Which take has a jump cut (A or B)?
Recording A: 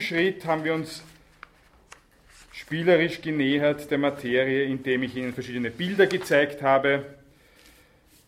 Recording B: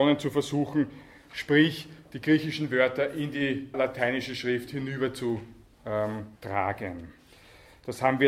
B